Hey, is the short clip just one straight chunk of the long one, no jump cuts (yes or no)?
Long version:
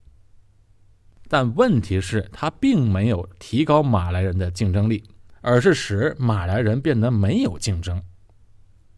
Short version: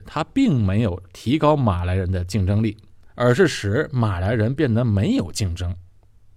yes